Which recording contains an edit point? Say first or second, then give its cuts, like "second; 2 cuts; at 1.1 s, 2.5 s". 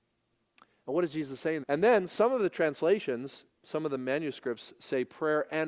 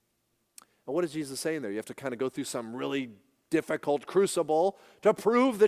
first; 2 cuts; at 1.6 s, 3.5 s